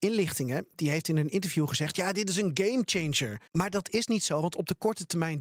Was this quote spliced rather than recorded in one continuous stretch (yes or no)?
yes